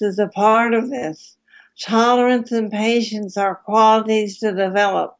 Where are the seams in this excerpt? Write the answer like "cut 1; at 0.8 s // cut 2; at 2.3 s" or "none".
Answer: none